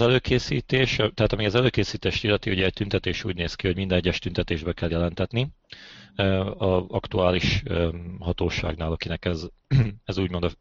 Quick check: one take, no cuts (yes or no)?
yes